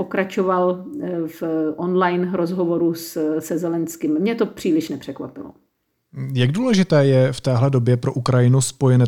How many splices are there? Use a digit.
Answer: 0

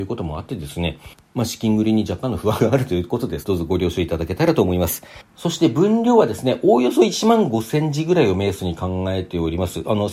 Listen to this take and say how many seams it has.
1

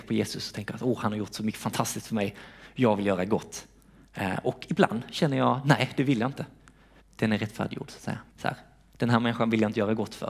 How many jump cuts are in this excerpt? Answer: 2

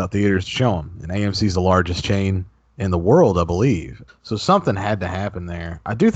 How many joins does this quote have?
1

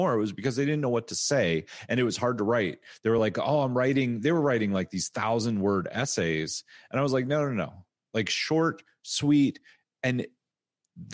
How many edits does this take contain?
0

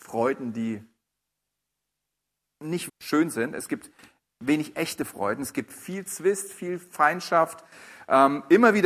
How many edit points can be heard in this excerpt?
1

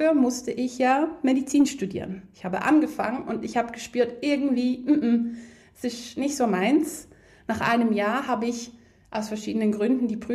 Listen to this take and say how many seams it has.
0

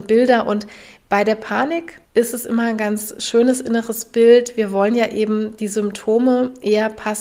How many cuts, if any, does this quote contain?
1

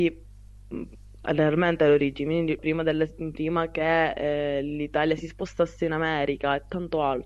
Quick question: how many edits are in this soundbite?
1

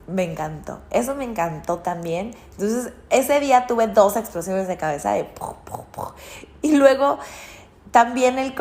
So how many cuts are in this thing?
0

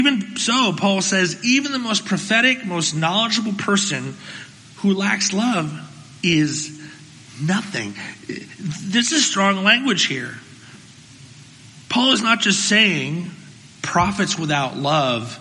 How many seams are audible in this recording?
2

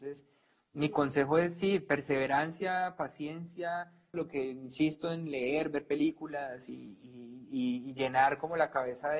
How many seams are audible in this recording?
1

